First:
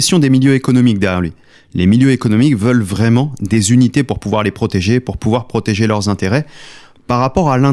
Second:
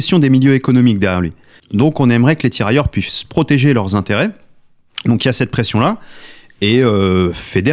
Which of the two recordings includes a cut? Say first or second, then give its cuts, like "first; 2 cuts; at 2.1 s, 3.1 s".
second; 1 cut; at 1.6 s